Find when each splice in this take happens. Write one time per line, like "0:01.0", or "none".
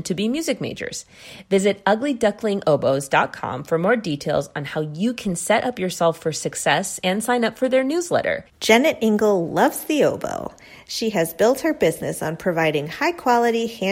0:08.5